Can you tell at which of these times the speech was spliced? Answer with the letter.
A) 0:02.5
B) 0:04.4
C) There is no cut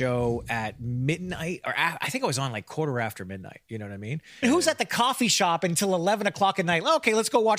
B